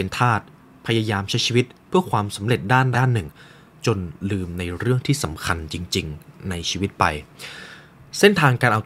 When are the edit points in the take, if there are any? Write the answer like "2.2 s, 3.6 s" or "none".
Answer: 2.9 s